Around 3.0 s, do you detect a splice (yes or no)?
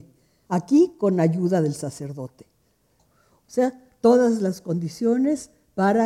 yes